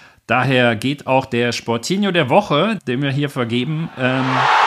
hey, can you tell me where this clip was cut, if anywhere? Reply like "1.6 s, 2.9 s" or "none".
2.8 s